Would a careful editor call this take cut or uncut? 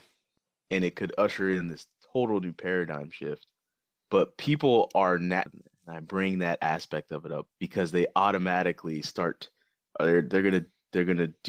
cut